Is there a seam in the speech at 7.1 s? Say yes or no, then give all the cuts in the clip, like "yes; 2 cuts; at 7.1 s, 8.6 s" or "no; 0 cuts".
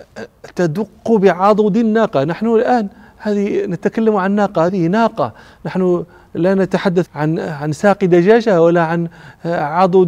yes; 2 cuts; at 4.7 s, 7.1 s